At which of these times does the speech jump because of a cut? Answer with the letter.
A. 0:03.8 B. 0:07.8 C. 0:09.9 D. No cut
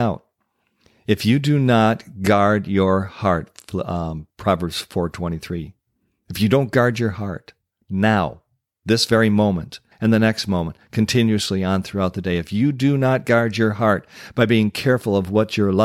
C